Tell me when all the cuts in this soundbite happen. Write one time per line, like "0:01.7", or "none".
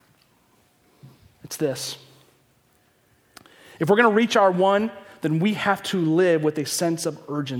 none